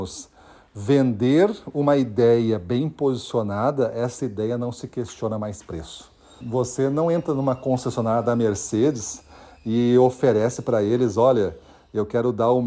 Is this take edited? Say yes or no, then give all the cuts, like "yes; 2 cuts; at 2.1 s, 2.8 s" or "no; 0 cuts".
yes; 1 cut; at 6.4 s